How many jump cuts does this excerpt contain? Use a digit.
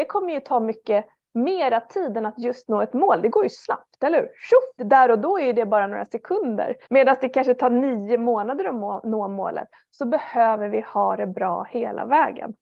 2